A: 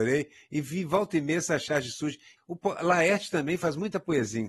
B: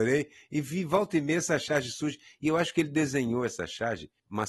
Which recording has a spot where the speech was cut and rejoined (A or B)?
A